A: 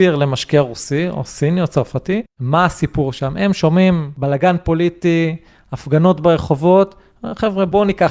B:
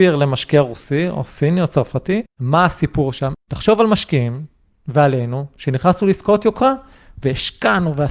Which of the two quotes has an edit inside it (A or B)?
B